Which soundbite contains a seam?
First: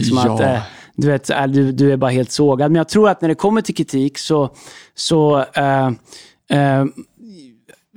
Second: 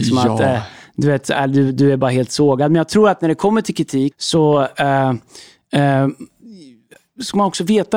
second; 1 cut; at 4.1 s

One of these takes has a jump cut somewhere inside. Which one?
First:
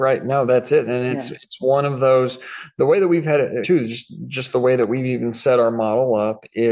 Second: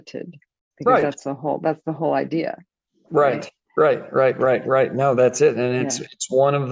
first; 1 cut; at 3.6 s

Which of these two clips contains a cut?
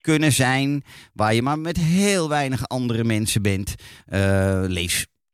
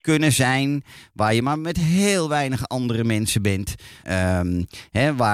second; 1 cut; at 4.0 s

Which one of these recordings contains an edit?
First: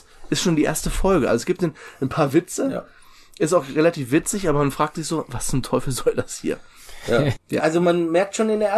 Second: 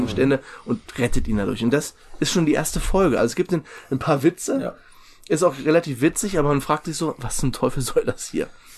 first; 1 cut; at 7.4 s

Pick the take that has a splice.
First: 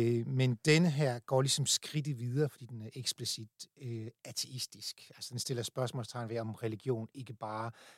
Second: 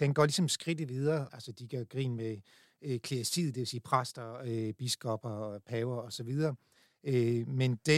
second; 1 cut; at 1.3 s

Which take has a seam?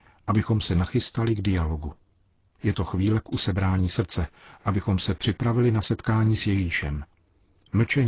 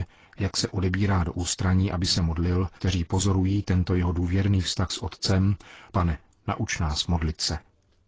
second; 2 cuts; at 2.8 s, 5.9 s

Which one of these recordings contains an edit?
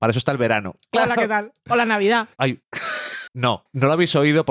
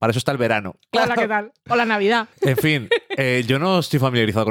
first; 1 cut; at 2.3 s

